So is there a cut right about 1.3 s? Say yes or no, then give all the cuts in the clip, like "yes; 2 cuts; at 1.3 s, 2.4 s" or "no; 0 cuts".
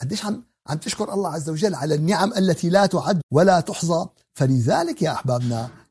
no; 1 cut; at 3.2 s